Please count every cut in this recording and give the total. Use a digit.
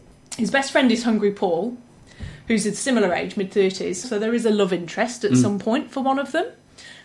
1